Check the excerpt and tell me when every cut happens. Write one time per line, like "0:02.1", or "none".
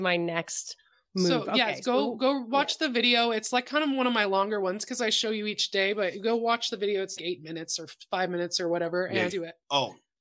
0:07.2
0:09.3